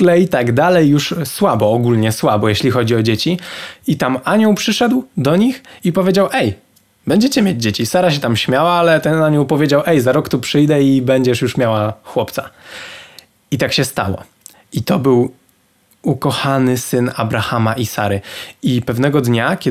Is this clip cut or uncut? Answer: uncut